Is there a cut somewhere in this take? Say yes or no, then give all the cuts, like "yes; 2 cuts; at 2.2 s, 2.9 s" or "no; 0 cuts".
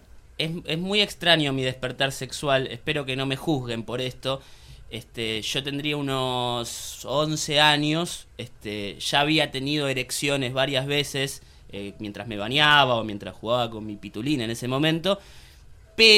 no; 0 cuts